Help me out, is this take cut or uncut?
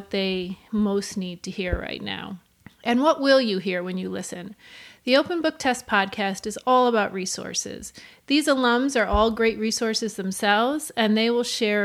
uncut